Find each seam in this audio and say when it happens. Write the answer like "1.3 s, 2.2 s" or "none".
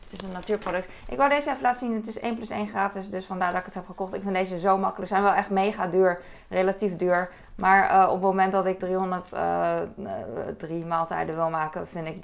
8.8 s